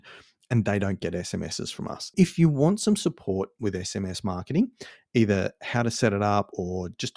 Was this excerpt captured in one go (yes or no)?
no